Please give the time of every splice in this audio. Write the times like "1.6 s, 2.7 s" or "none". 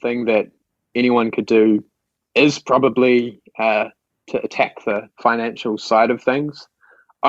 none